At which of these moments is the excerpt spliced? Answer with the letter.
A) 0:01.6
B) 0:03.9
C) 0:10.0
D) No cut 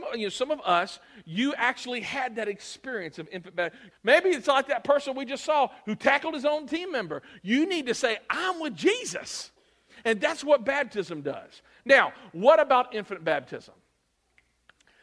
B